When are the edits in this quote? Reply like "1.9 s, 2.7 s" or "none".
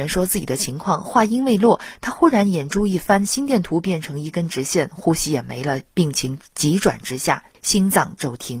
none